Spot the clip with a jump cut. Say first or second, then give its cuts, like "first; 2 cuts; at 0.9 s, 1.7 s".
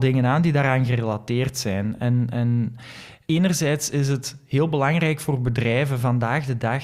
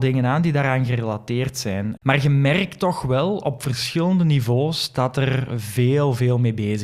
second; 1 cut; at 2.0 s